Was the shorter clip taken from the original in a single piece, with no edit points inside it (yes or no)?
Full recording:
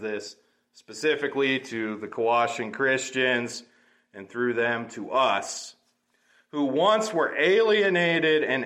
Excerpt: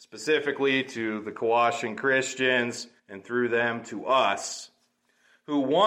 no